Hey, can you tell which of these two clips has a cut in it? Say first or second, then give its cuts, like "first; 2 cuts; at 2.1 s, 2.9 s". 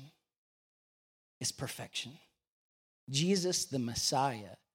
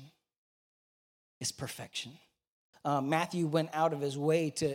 second; 1 cut; at 2.7 s